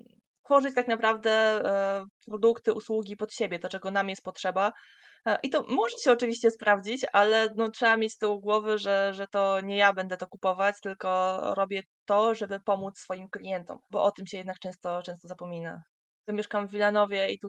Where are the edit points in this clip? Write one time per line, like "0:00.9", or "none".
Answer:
0:13.9
0:16.2